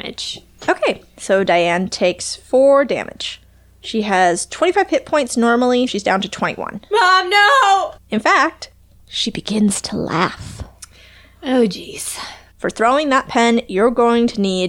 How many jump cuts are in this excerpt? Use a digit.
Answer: 3